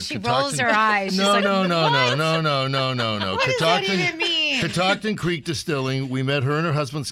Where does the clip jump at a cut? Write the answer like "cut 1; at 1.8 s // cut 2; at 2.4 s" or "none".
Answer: none